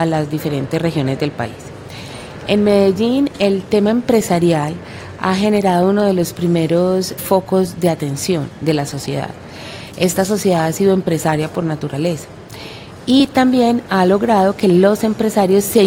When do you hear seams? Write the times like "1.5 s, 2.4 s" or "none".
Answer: 7.2 s